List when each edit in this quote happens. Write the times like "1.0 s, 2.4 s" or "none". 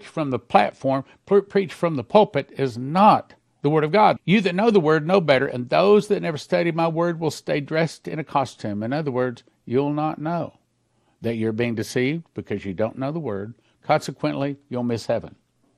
4.2 s

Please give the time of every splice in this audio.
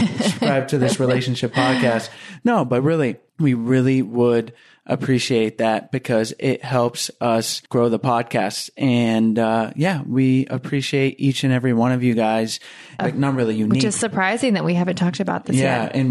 7.7 s, 13.0 s

